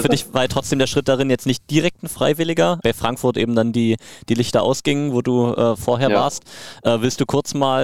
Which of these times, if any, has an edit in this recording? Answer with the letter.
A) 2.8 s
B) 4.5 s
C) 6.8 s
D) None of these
A